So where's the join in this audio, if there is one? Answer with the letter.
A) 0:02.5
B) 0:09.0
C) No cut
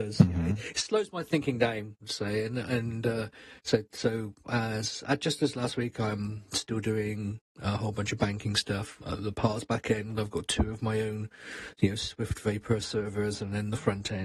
B